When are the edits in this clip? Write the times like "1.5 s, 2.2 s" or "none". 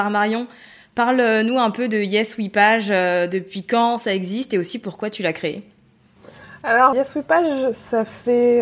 6.9 s

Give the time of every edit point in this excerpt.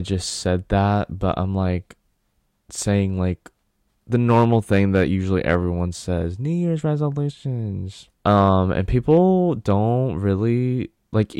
8.1 s

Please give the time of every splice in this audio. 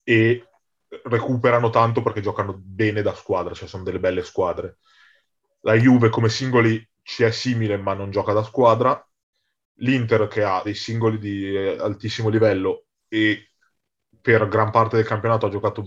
10.6 s

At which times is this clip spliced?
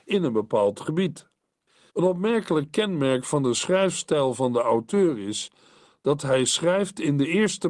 1.9 s

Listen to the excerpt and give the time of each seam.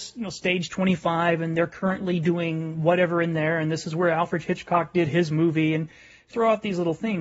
6.3 s

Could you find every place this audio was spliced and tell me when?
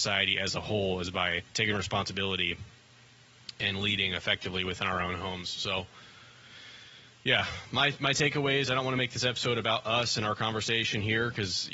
1.5 s

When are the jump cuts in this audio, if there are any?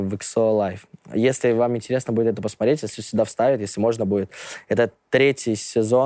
none

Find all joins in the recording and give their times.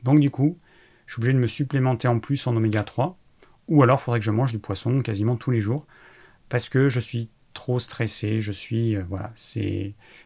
none

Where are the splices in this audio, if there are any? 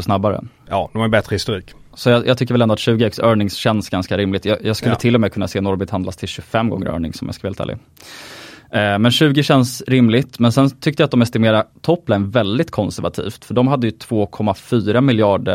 1.9 s

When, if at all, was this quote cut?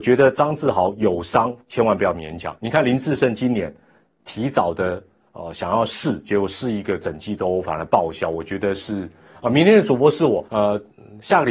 10.5 s

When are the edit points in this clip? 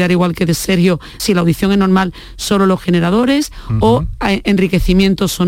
1.2 s

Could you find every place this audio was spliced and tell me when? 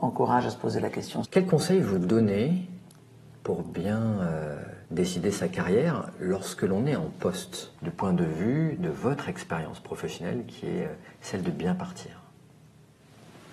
1.2 s, 4.8 s, 7.8 s

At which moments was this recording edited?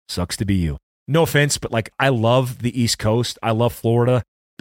none

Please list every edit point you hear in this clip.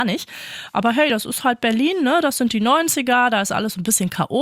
none

